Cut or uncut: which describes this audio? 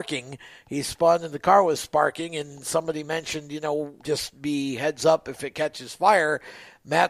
cut